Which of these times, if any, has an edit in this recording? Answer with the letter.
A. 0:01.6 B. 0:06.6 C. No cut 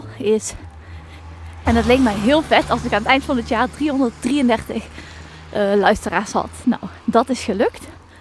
A